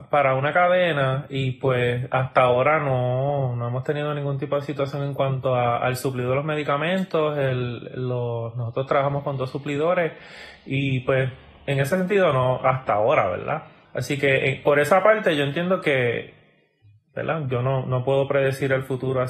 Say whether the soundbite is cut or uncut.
cut